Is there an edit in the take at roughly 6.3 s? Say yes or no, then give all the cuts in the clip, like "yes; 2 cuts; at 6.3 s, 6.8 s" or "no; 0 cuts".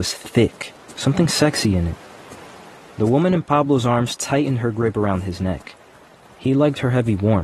no; 1 cut; at 1.0 s